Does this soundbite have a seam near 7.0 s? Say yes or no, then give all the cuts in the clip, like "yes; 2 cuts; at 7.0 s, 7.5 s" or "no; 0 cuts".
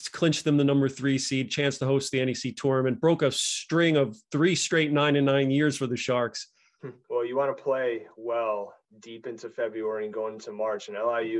yes; 1 cut; at 7.0 s